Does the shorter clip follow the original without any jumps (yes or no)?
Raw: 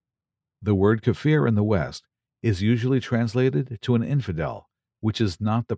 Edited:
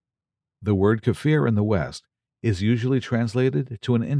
yes